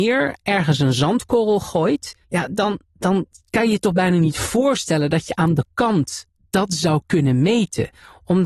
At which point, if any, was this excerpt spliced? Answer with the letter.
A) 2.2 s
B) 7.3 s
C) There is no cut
A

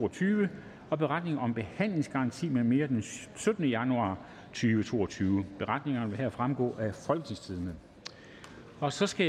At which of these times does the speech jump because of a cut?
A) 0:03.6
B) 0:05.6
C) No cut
C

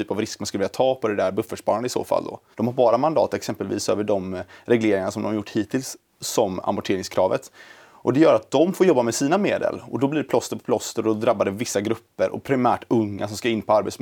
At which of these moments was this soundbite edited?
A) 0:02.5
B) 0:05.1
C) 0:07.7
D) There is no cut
A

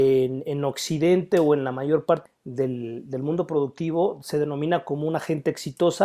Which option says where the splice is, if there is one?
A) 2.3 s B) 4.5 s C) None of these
A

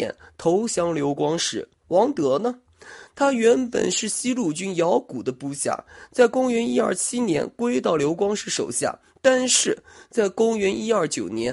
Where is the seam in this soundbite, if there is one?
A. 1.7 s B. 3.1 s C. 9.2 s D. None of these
D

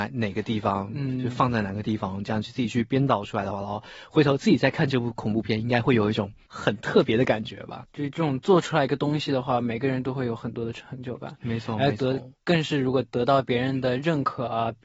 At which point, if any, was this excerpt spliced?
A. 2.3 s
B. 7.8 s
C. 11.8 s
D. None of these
B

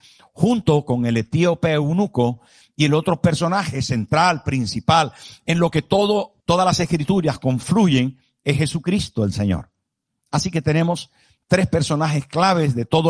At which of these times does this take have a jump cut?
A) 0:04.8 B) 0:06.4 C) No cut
B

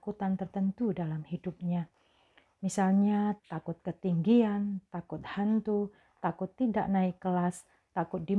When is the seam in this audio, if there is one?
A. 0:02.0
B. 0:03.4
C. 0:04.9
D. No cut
B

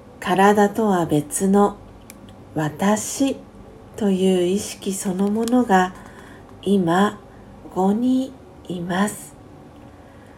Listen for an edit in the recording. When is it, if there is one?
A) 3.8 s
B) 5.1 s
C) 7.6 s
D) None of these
C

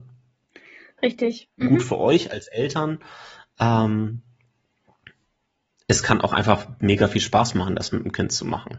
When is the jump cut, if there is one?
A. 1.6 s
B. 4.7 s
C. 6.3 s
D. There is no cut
A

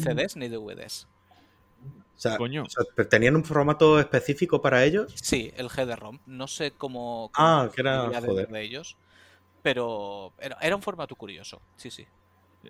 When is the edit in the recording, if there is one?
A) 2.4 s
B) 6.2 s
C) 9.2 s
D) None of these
B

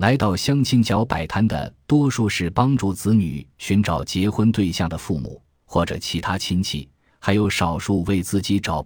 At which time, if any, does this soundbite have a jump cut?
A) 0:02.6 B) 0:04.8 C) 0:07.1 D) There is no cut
C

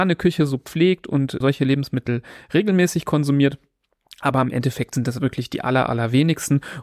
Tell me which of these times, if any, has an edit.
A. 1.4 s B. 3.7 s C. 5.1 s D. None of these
A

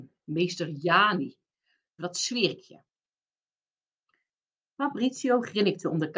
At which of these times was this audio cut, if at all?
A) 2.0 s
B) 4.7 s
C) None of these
A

